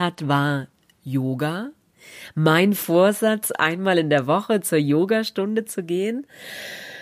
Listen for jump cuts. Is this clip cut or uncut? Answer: uncut